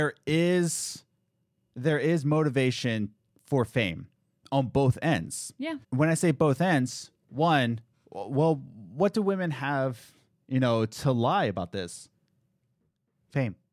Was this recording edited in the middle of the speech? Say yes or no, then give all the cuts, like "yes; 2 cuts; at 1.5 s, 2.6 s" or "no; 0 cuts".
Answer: yes; 1 cut; at 5.8 s